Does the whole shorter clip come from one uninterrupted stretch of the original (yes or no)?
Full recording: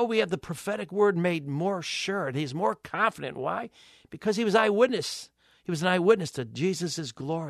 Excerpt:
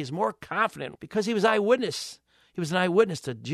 no